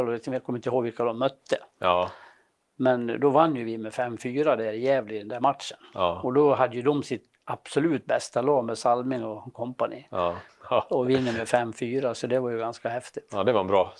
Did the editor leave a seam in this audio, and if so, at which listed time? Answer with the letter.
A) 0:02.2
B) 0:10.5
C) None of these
B